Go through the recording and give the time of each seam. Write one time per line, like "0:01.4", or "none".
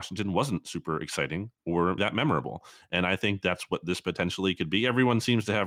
0:02.0